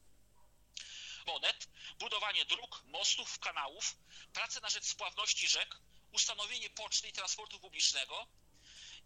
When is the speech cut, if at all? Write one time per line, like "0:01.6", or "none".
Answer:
0:01.3
0:03.4